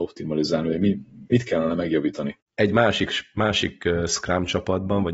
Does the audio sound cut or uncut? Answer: cut